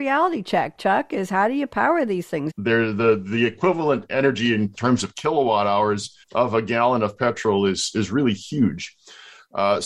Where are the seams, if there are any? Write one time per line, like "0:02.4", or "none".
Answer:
0:02.5
0:06.2